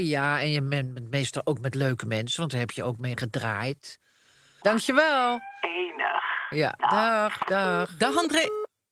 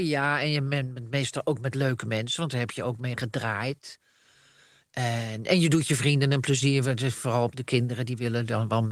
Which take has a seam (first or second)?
first